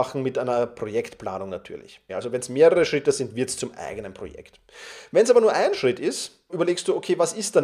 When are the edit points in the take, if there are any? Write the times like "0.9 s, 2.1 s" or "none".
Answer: 2.1 s, 6.5 s

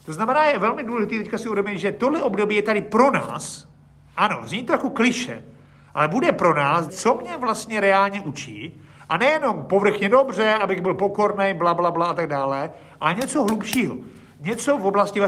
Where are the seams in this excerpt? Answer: 6.9 s

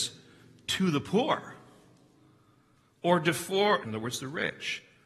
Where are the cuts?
3.8 s

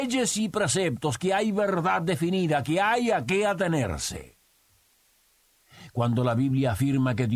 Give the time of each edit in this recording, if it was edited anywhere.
none

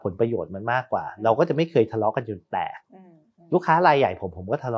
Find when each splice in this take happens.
none

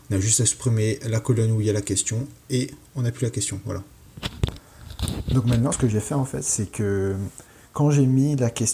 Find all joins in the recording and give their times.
none

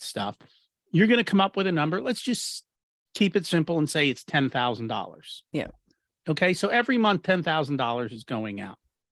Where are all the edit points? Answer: none

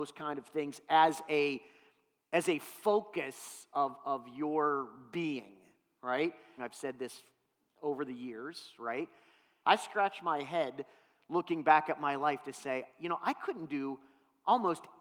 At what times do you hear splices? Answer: 6.6 s, 9.6 s

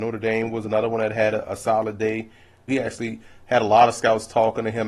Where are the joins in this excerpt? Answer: 2.7 s

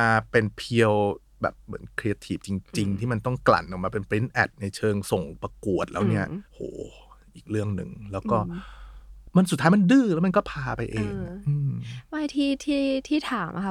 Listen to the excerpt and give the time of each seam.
6.5 s

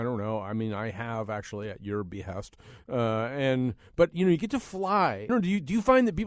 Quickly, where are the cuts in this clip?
5.3 s

